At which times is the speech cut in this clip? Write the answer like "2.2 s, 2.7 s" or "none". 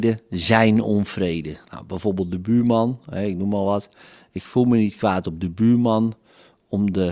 1.6 s